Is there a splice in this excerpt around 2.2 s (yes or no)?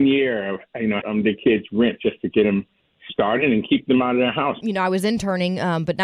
no